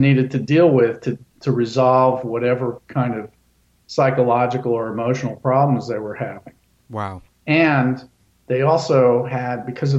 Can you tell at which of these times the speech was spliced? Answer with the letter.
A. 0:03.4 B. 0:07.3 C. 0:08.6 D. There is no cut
B